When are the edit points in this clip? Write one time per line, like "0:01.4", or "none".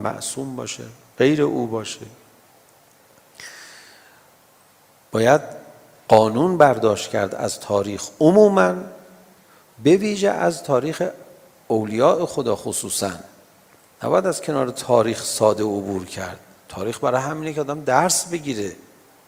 none